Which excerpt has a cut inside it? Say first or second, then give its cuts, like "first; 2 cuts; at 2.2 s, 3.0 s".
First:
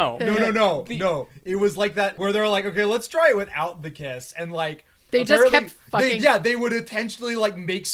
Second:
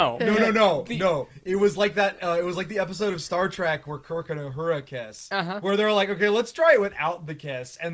first; 1 cut; at 2.2 s